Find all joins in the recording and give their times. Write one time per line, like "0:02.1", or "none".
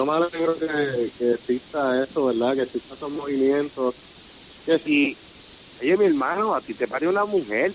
0:04.8